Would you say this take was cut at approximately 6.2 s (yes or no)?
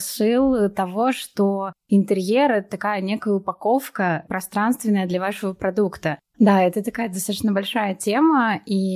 yes